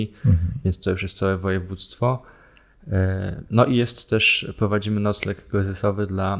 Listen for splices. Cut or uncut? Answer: uncut